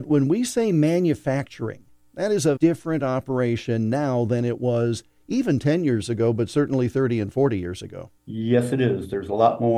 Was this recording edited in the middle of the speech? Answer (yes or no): yes